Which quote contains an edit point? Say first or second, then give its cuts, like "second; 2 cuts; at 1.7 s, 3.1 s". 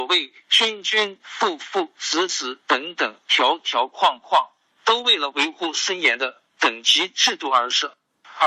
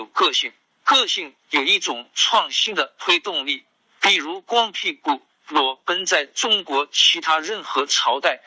first; 1 cut; at 1.2 s